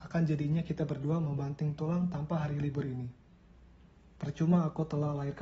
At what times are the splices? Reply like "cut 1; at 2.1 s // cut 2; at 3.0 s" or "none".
none

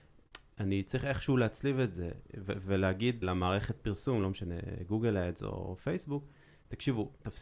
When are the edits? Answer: cut 1; at 3.2 s

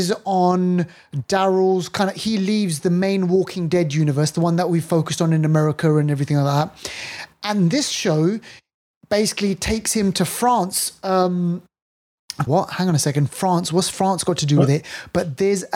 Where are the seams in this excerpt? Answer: cut 1; at 12.5 s

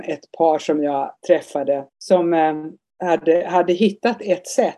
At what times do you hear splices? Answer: cut 1; at 1.9 s

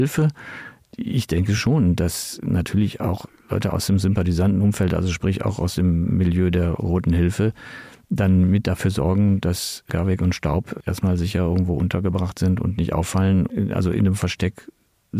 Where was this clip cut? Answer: none

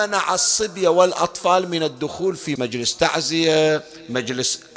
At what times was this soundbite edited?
cut 1; at 2.6 s

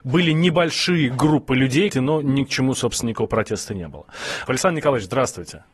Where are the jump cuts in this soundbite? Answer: cut 1; at 1.9 s // cut 2; at 3.0 s // cut 3; at 4.5 s

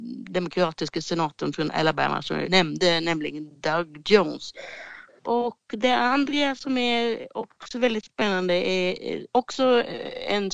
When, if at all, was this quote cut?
cut 1; at 2.4 s // cut 2; at 5.1 s

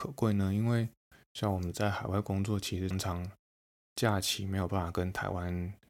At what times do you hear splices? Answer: cut 1; at 2.9 s

